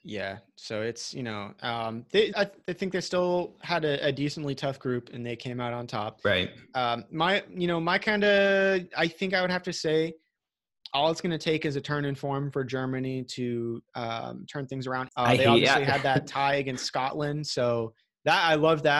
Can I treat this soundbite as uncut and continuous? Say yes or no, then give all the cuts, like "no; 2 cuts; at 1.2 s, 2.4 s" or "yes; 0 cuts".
no; 2 cuts; at 2.3 s, 15.1 s